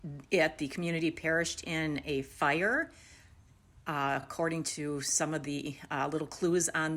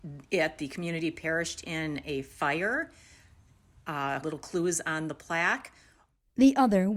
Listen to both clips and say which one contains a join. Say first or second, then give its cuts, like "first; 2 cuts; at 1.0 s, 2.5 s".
second; 1 cut; at 4.2 s